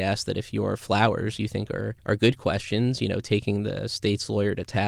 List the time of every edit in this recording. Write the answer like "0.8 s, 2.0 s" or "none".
none